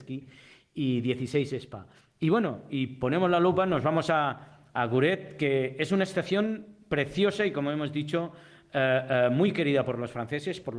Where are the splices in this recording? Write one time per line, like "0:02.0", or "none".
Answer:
none